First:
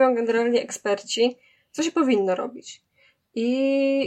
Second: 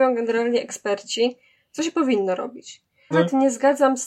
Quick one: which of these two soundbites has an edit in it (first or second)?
second